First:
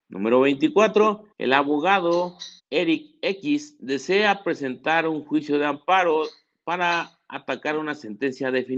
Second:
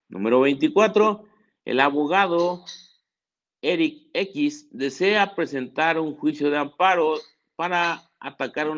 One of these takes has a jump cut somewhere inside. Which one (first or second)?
first